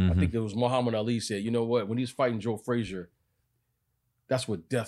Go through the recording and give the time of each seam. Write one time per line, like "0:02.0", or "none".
none